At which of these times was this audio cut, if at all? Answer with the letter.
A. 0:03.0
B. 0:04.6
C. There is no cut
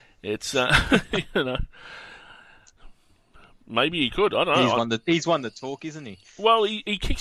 C